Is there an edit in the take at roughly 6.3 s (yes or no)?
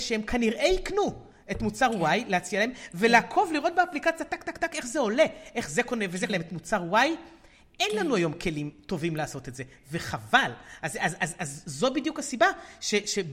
yes